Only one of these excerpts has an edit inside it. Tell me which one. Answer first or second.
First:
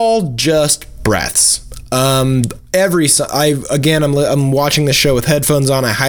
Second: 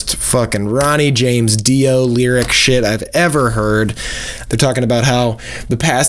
second